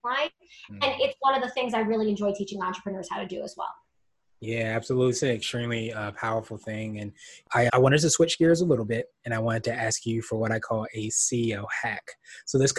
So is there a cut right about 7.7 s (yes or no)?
yes